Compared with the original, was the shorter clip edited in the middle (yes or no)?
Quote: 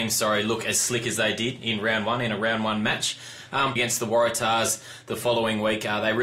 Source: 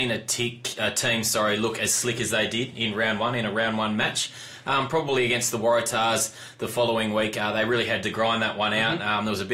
yes